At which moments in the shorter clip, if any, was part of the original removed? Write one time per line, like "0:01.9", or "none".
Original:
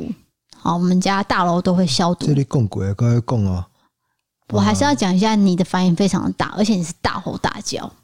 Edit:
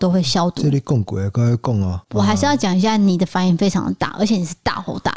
0:02.0